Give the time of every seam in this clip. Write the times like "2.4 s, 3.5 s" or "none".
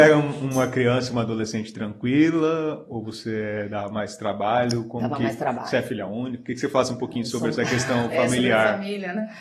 none

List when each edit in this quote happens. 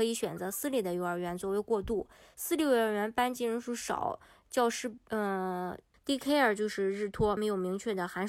5.9 s, 7.4 s

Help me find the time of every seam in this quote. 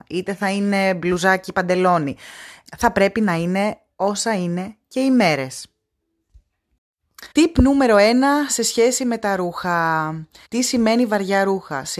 2.7 s, 7.3 s, 10.4 s

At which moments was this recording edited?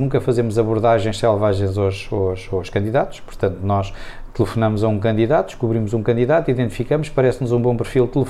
none

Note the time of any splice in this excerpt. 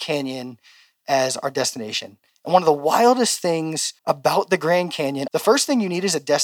2.3 s, 4.0 s, 5.3 s

